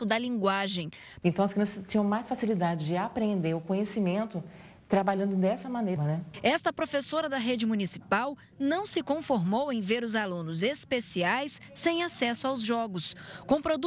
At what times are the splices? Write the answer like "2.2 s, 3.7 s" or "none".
1.2 s, 6.0 s